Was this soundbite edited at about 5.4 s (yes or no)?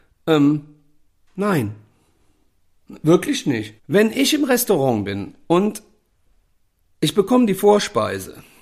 no